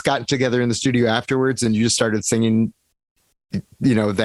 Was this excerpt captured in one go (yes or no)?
yes